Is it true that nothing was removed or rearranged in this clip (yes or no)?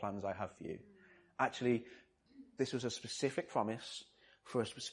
no